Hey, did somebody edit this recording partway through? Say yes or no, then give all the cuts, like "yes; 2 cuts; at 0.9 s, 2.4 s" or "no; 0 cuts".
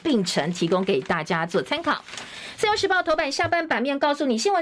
no; 0 cuts